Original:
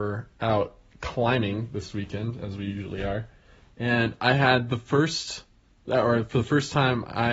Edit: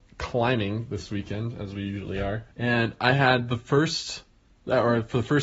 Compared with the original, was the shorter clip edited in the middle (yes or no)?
yes